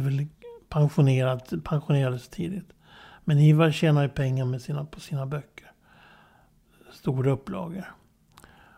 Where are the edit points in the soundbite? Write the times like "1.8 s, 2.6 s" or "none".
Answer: none

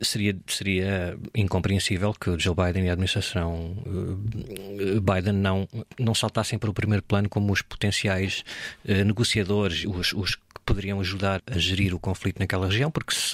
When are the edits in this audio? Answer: 9.8 s, 11.4 s

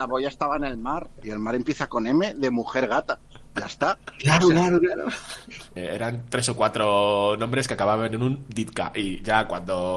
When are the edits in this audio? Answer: 5.8 s

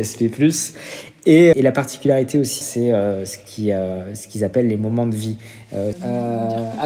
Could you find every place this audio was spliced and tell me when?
1.5 s, 2.6 s, 5.9 s

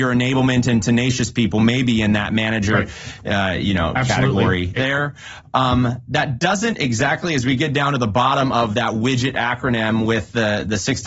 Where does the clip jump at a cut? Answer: 4.8 s

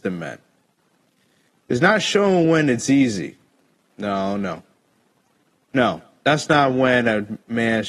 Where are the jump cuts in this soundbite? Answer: 5.6 s

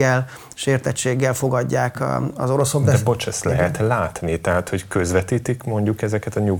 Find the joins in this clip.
none

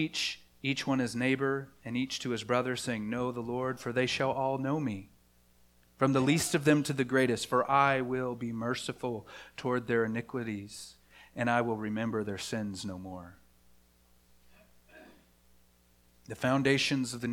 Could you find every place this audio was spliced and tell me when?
none

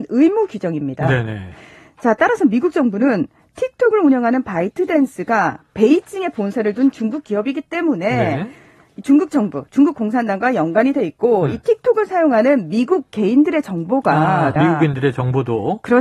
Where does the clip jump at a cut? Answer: 14.6 s

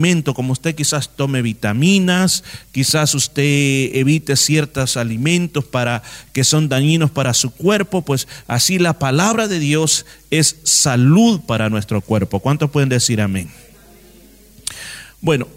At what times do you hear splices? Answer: none

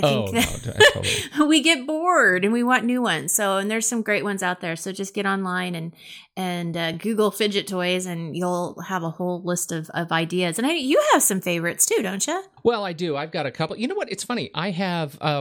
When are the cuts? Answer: none

